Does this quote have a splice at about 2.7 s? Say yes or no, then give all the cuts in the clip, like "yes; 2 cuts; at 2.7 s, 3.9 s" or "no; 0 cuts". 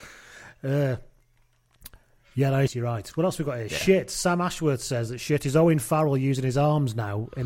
yes; 1 cut; at 2.7 s